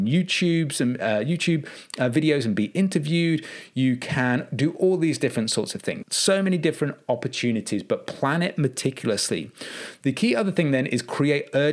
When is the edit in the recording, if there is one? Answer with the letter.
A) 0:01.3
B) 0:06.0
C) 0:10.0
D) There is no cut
B